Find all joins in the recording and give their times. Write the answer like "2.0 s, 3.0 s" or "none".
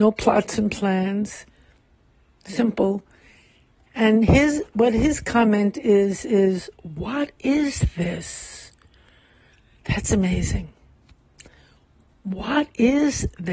none